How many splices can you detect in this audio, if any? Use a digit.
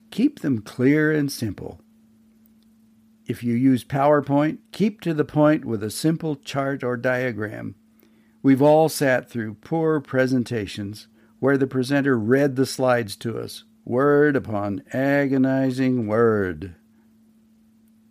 1